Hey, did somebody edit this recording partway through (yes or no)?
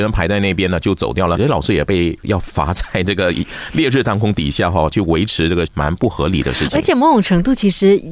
yes